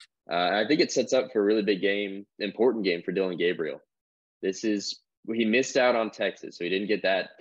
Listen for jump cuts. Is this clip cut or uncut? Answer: uncut